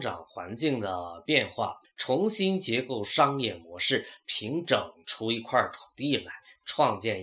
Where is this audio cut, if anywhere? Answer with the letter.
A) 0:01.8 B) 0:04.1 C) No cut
A